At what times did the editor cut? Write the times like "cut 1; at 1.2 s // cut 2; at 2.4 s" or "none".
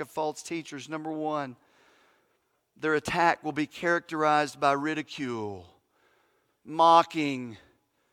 cut 1; at 6.5 s